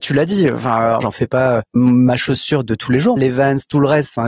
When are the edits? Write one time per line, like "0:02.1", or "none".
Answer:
0:01.0
0:03.2